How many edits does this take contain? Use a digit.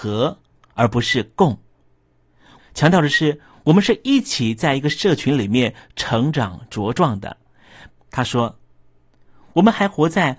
2